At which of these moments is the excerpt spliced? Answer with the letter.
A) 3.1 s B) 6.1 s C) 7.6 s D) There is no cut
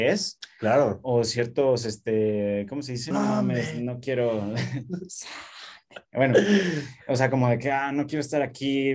A